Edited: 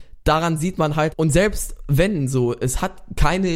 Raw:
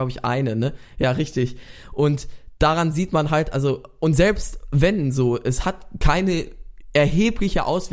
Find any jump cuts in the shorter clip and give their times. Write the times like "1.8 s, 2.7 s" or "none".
1.1 s

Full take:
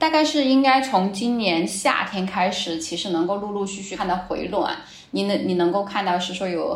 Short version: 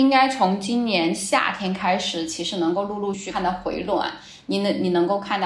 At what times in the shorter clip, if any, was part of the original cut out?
3.1 s

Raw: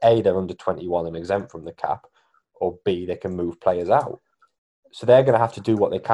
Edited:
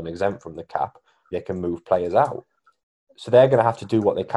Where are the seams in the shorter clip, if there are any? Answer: 1.3 s

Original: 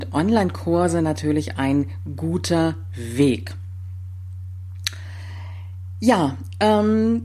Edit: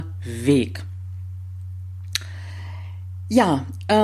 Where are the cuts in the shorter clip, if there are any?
none

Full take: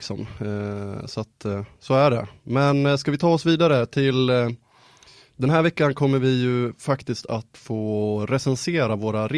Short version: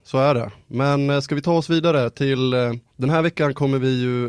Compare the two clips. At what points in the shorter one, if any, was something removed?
2.9 s

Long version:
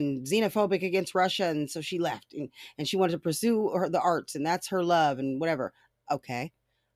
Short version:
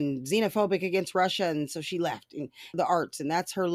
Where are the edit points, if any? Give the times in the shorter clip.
2.7 s

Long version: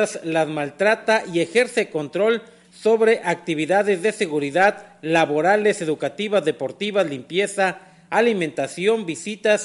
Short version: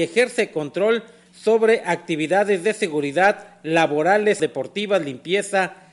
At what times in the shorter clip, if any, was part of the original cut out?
4.4 s

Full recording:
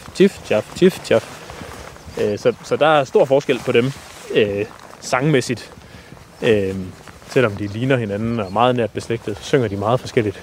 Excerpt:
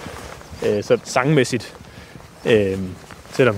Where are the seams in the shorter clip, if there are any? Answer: 1.0 s

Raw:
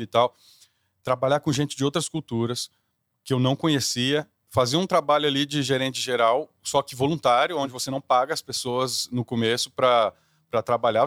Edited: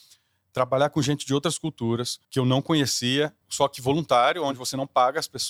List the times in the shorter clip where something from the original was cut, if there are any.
2.2 s, 3.4 s

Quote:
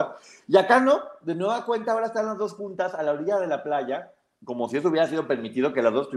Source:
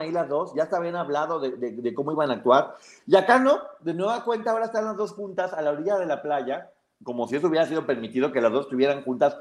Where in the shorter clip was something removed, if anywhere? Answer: none

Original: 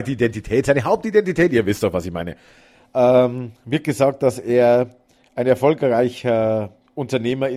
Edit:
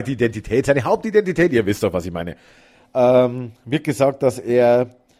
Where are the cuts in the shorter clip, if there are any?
none

